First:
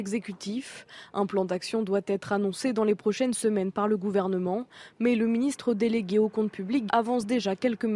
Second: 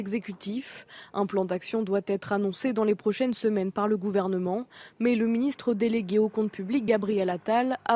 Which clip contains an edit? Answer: first; 1 cut; at 6.9 s

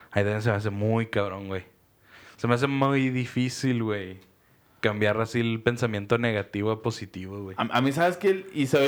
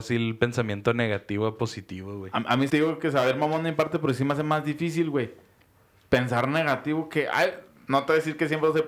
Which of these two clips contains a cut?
second; 1 cut; at 2.7 s

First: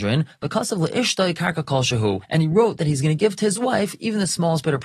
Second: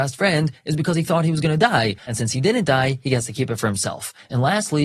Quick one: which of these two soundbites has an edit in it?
second; 1 cut; at 2.0 s

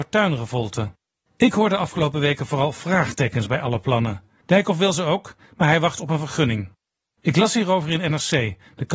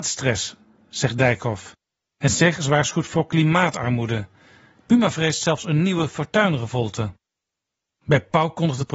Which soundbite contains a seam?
first; 3 cuts; at 1.3 s, 4.4 s, 7.2 s

